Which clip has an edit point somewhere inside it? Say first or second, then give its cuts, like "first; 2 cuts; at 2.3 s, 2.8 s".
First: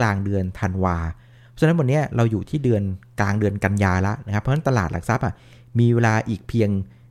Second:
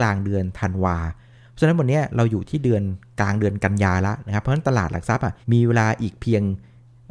second; 1 cut; at 5.4 s